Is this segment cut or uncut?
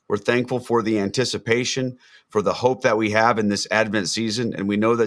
uncut